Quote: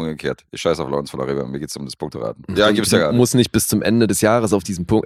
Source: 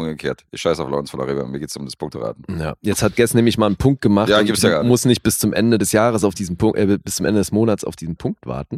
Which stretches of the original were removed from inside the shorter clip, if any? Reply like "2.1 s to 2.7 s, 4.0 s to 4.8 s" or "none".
2.5 s to 4.3 s